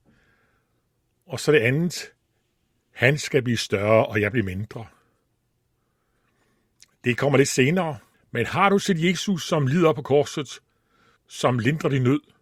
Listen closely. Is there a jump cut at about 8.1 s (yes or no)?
yes